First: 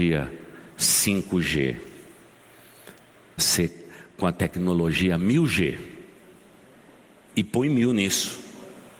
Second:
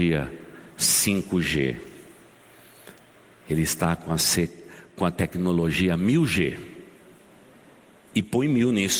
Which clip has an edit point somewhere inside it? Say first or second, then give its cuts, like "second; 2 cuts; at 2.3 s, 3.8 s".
first; 1 cut; at 3.4 s